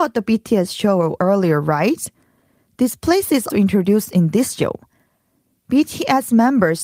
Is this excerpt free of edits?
no; 1 cut; at 3.5 s

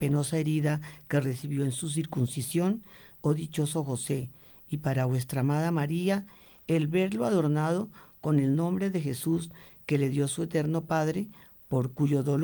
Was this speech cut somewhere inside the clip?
yes; 1 cut; at 3.1 s

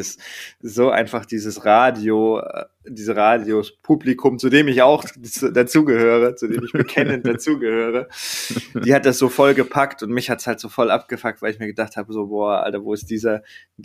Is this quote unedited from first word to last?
yes; 0 cuts

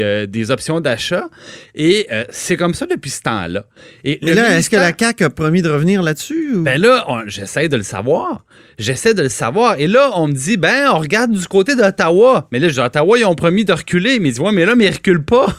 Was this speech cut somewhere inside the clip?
no; 0 cuts

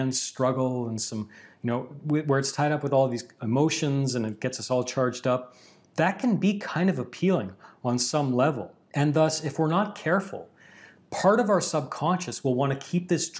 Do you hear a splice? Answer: no; 0 cuts

